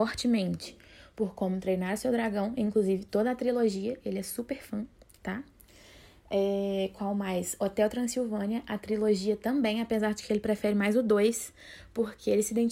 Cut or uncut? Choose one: uncut